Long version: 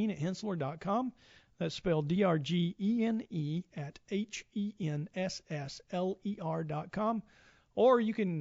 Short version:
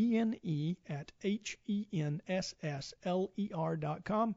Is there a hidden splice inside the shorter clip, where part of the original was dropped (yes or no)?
no